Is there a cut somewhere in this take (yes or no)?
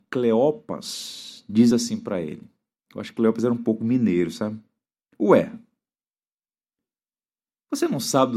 no